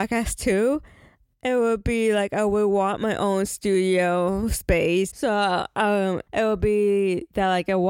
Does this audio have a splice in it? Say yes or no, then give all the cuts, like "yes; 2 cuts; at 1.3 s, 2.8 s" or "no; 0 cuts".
yes; 2 cuts; at 5.1 s, 6.3 s